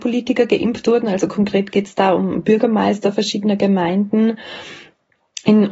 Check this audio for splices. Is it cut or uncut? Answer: uncut